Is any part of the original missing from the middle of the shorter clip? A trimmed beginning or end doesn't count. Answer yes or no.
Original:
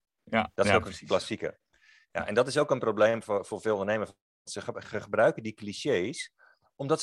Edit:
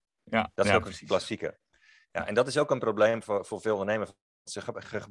no